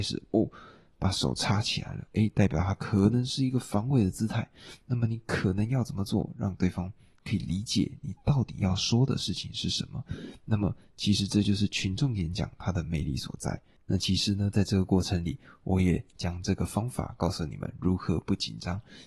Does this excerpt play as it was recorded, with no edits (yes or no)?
yes